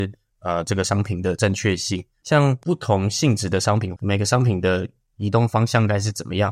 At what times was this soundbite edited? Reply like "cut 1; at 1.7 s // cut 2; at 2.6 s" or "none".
cut 1; at 2.2 s // cut 2; at 4.0 s